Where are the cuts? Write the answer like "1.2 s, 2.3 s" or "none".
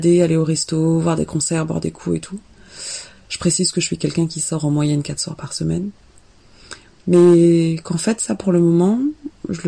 none